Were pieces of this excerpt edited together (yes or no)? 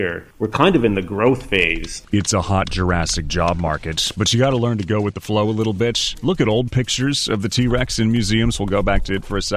no